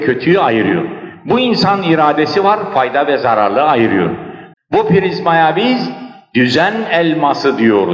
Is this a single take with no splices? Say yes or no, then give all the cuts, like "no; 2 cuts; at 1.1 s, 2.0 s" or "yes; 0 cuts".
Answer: no; 1 cut; at 4.5 s